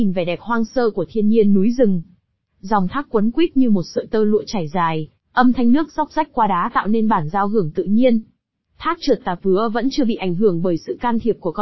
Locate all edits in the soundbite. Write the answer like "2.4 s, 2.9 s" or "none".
none